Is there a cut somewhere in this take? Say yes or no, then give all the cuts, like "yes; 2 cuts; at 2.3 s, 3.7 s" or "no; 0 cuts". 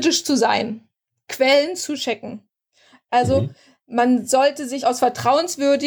yes; 1 cut; at 4.8 s